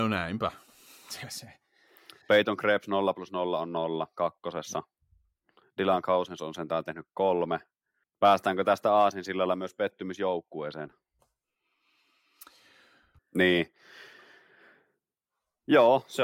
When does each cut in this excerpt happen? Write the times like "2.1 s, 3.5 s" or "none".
8.0 s, 13.2 s